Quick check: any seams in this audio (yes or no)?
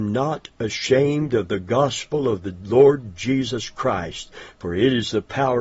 no